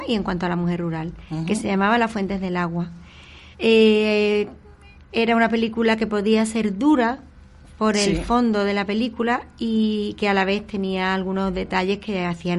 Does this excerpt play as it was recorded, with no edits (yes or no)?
no